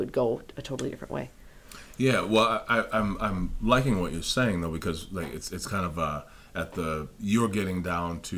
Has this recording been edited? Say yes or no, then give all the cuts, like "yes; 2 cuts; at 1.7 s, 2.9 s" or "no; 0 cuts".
no; 0 cuts